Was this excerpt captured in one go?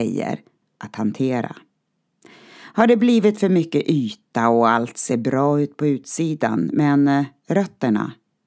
yes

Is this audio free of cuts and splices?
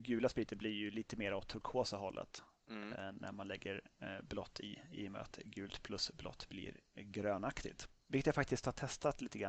yes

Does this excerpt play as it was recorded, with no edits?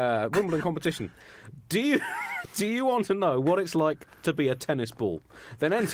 yes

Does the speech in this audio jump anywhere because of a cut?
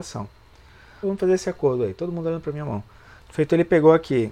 yes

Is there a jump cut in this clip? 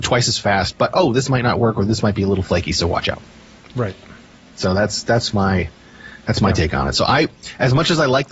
no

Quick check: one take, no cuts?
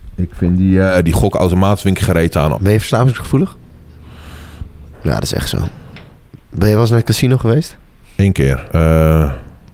no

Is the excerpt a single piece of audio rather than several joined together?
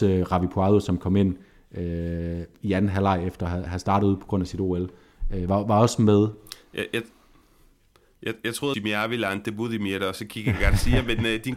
no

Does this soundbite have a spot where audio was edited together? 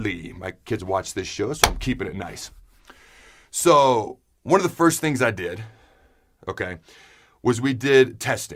no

